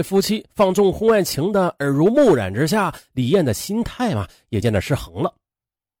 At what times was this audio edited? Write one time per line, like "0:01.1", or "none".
0:04.6